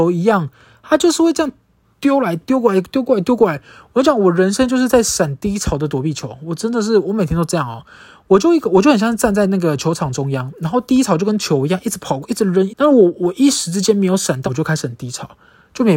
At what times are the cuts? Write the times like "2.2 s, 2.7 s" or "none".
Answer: 12.7 s, 14.5 s